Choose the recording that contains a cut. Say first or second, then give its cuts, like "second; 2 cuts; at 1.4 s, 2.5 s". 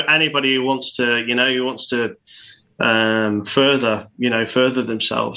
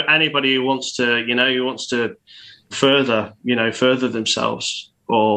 second; 1 cut; at 2.7 s